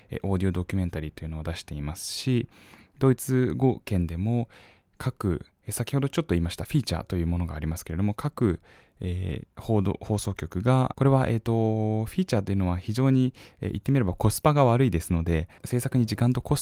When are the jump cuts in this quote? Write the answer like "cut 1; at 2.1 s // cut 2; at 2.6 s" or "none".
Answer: none